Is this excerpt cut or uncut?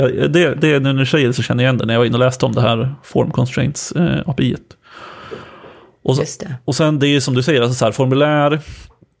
uncut